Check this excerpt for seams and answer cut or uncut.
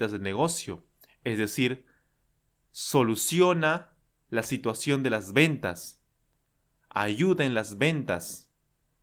uncut